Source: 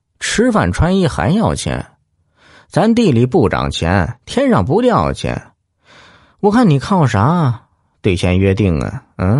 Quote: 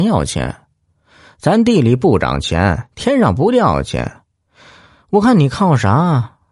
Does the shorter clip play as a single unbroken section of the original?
yes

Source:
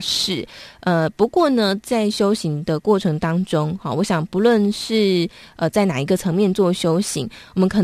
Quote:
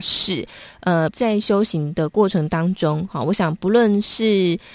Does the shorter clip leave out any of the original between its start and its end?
yes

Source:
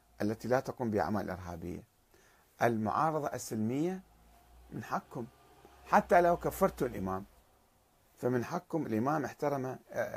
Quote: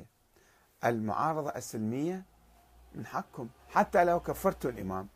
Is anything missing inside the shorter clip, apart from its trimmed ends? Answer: yes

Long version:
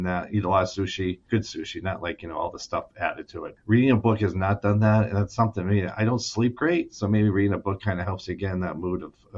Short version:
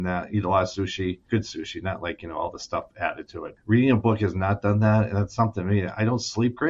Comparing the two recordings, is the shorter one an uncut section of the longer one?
yes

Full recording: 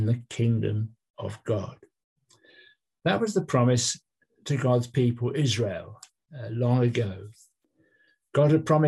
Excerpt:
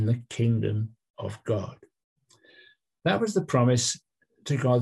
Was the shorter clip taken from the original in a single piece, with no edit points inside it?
yes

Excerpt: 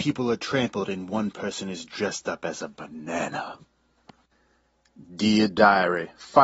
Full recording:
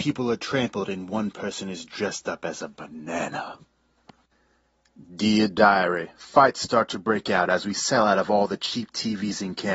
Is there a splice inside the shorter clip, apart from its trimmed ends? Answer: no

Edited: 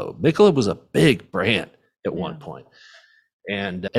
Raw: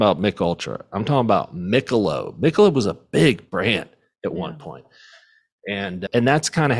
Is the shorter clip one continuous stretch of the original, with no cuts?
yes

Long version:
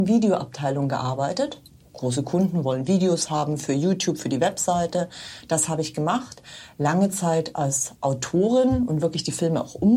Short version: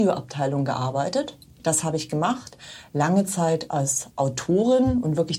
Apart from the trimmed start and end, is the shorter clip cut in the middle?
yes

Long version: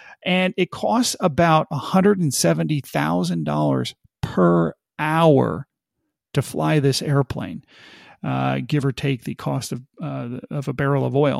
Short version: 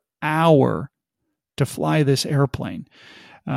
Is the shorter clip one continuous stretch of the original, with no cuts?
yes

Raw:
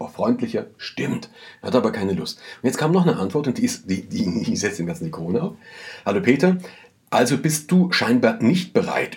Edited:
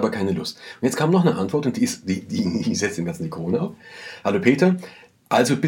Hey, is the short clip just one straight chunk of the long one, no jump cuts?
yes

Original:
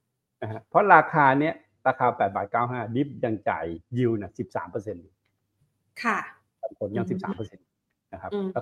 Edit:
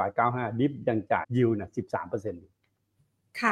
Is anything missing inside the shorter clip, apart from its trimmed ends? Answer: yes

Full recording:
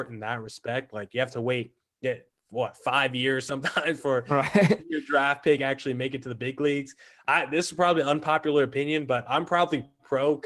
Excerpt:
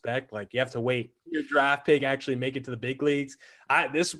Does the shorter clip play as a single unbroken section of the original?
no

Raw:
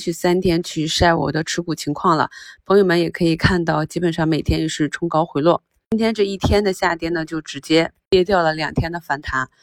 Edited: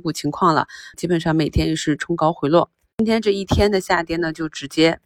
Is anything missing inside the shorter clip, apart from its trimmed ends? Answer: yes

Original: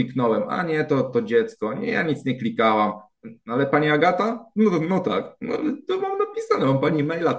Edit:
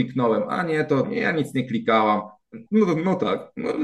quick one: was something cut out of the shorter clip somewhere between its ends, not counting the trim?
yes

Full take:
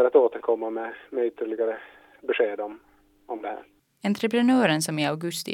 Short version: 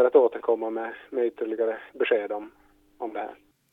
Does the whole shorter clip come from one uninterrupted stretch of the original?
no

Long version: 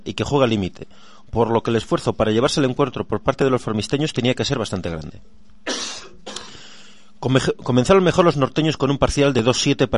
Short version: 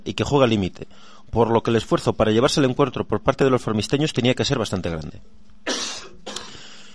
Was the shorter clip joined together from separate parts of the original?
no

